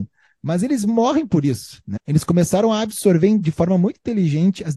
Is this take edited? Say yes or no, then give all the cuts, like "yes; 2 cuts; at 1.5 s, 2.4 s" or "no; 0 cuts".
yes; 1 cut; at 2.0 s